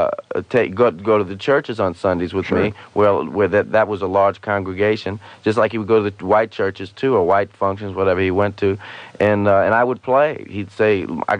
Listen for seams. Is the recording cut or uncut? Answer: uncut